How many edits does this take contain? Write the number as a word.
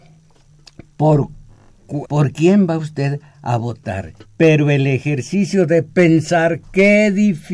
two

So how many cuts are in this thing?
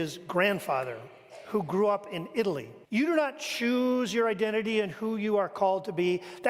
one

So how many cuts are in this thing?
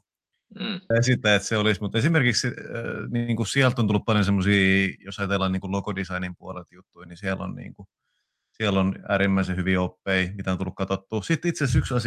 one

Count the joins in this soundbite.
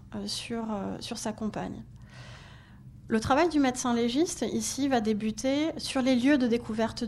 zero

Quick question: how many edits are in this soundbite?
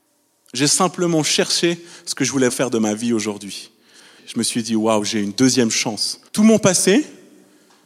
three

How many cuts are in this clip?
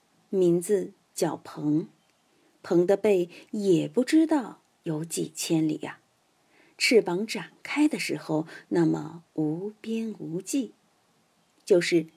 two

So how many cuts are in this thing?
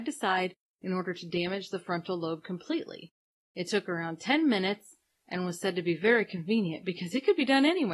zero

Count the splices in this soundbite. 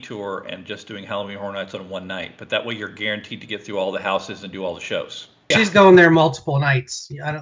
one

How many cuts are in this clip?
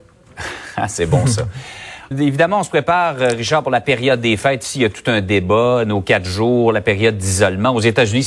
one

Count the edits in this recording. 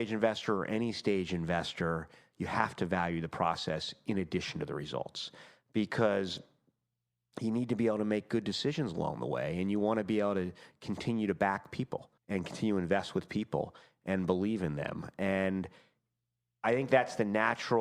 one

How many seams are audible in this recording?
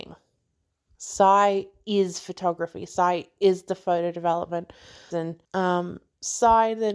one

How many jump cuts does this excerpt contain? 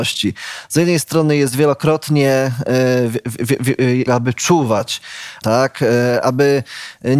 two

